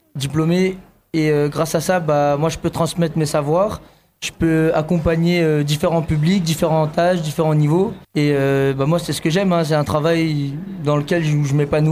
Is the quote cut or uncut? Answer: cut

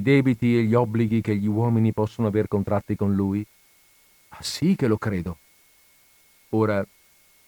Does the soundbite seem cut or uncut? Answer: uncut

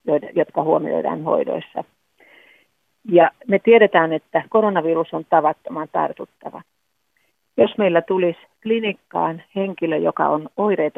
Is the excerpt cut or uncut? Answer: uncut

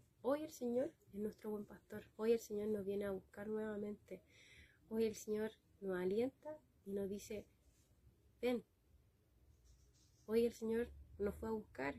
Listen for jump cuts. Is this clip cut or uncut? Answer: cut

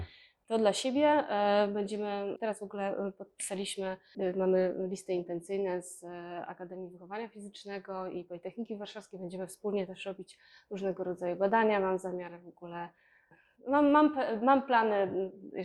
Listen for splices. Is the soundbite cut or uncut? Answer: uncut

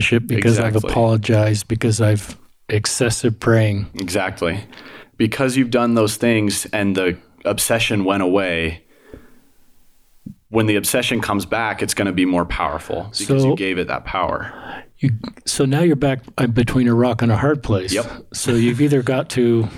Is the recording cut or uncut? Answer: uncut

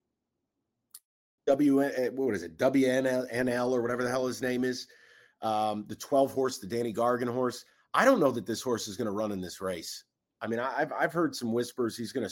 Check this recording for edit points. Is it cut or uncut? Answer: cut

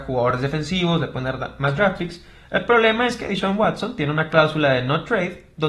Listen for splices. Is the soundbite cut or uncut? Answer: uncut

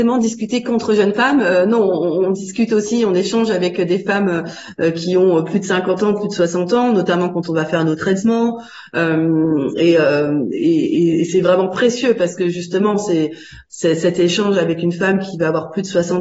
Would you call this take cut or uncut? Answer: uncut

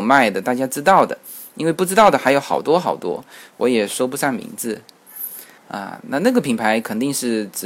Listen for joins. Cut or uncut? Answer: cut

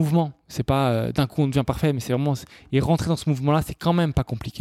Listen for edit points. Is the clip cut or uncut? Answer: uncut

